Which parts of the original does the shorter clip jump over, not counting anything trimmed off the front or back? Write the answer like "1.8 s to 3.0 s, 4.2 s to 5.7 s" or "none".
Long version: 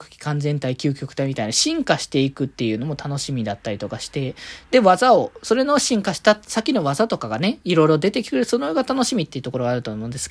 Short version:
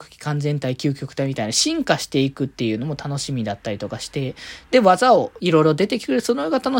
5.4 s to 7.6 s